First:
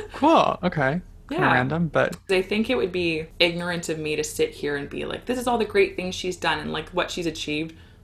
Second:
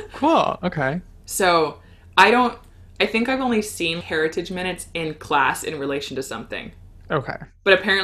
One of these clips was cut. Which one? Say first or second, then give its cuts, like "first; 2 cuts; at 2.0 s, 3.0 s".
second; 2 cuts; at 1.2 s, 4.0 s